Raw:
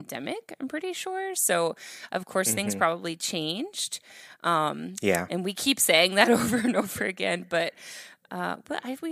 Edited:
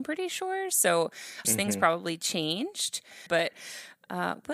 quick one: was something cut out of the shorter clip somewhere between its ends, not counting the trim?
yes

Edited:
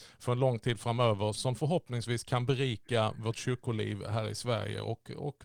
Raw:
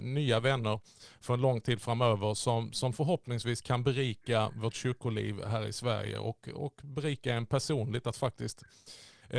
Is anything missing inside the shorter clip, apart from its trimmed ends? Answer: yes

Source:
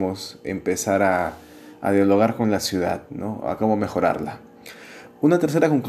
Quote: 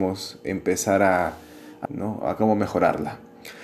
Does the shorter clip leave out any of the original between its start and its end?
yes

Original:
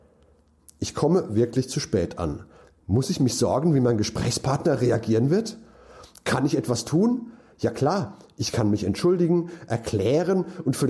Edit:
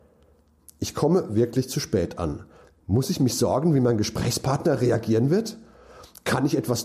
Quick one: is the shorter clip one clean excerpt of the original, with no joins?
yes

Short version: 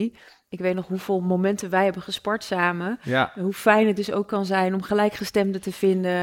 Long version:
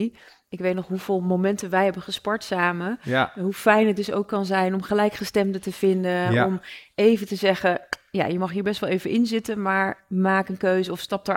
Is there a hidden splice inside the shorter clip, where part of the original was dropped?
no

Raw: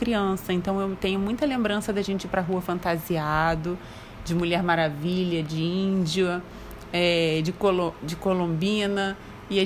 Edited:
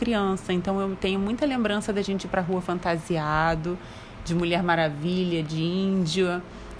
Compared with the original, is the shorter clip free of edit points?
yes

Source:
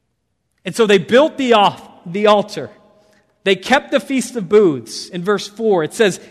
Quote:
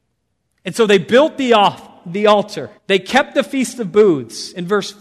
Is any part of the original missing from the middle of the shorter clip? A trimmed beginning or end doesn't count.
yes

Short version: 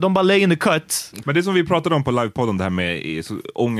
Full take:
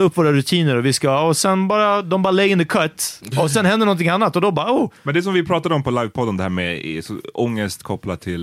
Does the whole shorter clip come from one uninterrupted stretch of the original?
no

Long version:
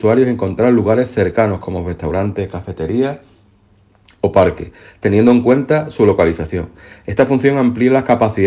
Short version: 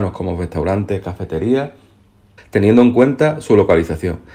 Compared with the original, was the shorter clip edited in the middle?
yes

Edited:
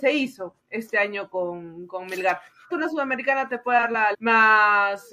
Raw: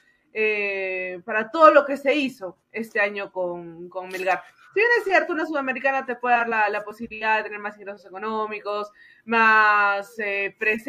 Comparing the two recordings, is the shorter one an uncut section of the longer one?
no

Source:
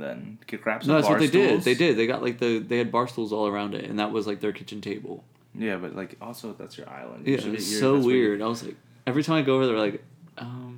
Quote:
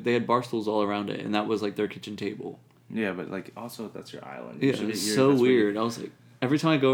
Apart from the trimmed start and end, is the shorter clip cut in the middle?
no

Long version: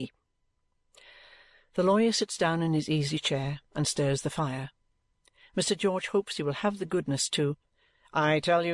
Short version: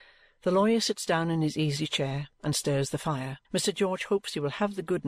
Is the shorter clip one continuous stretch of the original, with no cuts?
no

